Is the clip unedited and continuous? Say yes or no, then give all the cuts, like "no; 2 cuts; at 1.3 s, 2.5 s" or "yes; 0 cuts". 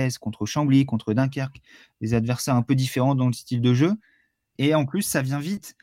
no; 1 cut; at 4.6 s